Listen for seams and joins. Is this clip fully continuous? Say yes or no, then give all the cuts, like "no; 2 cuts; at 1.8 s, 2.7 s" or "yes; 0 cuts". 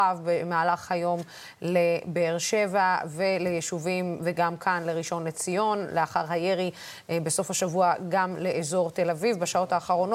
yes; 0 cuts